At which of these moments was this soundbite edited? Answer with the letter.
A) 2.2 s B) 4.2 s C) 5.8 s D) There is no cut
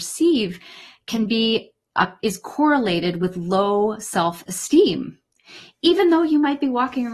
A